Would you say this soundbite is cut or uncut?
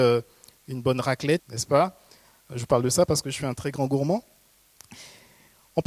cut